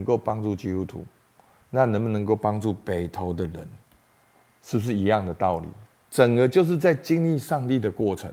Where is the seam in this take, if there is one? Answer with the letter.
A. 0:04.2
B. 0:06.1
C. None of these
B